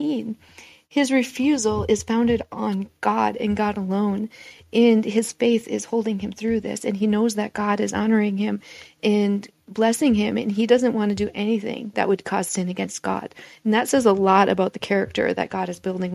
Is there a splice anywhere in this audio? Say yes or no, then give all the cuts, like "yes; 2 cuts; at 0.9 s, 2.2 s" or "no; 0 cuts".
no; 0 cuts